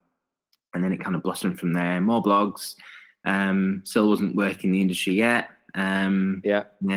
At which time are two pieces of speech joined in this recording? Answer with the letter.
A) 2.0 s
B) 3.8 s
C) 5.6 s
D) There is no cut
D